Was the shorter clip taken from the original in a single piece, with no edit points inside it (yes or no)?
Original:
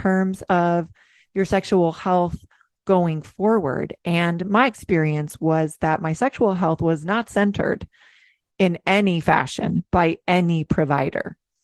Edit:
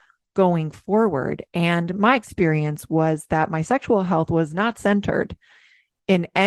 yes